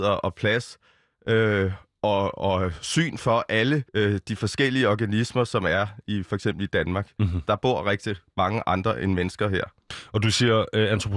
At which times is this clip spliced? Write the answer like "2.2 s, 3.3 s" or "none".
3.9 s